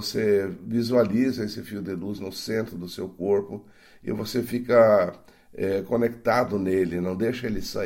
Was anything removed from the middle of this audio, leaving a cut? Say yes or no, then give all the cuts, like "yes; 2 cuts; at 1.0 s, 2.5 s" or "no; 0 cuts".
no; 0 cuts